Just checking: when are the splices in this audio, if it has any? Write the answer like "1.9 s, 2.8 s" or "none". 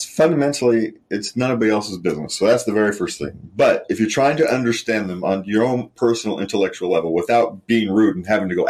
none